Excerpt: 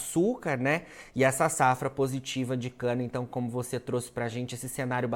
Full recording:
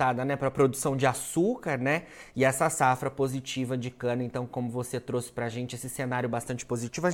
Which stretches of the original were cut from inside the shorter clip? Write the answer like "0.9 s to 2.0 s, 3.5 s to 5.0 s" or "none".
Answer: none